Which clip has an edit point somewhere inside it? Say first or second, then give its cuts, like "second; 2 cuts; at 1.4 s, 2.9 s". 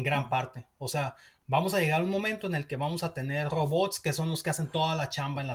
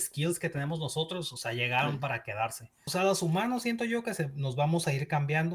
second; 1 cut; at 2.9 s